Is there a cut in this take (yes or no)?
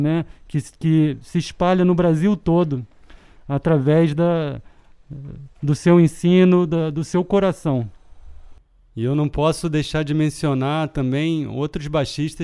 no